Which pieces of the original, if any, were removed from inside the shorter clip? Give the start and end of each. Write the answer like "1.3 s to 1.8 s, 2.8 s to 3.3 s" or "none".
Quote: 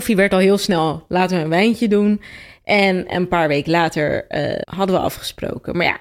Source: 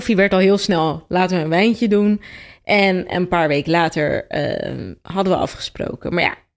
4.6 s to 5.0 s